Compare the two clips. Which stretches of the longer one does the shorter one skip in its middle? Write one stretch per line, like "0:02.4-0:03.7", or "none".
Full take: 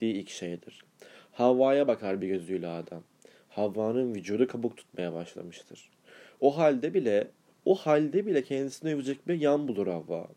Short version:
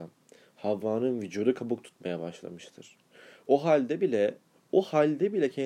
none